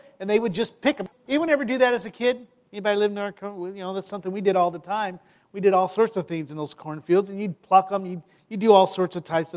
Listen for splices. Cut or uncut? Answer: uncut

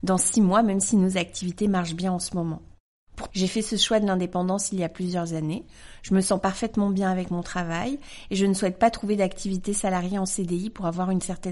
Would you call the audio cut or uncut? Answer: cut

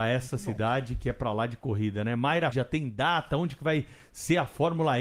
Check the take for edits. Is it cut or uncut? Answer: cut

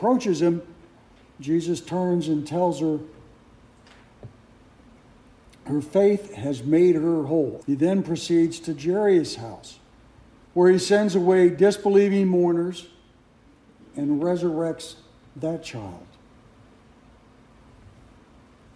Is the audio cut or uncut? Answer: cut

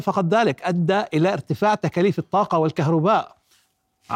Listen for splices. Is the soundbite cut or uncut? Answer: uncut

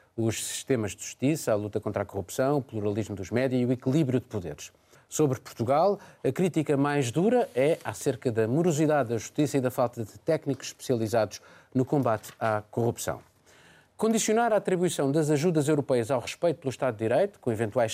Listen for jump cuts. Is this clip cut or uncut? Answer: cut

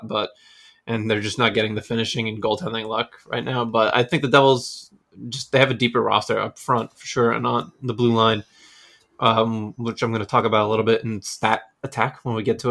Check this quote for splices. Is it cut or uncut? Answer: uncut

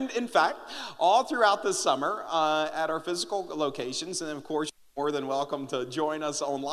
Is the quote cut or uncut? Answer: uncut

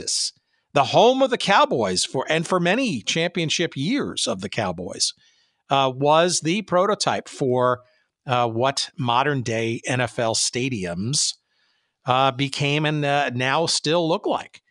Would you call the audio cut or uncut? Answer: uncut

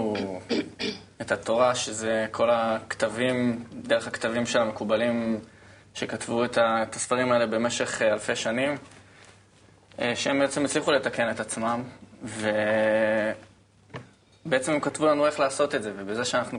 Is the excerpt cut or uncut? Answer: uncut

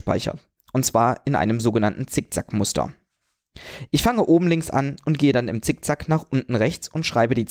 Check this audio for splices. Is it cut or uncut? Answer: uncut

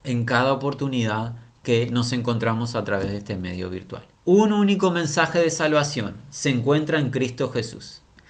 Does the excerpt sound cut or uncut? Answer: cut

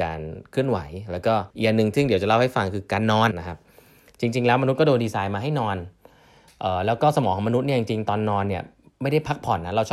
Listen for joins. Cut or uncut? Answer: cut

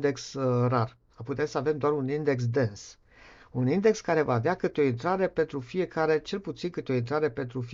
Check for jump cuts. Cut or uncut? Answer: uncut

